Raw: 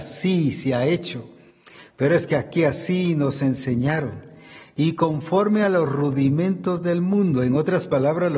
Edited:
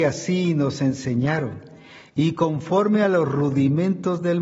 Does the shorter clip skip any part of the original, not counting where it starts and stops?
no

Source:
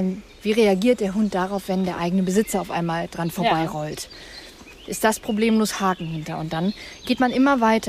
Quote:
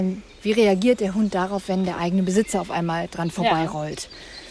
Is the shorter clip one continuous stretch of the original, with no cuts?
yes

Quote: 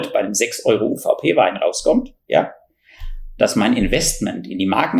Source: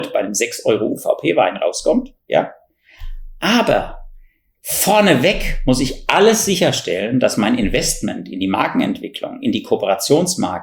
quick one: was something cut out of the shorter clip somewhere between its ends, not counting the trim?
yes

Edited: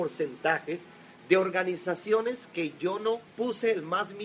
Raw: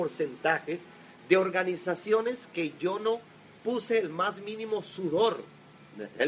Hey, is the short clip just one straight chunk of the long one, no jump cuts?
no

